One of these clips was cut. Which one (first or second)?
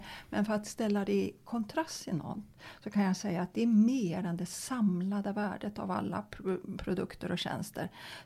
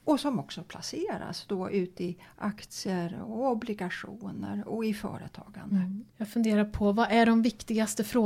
second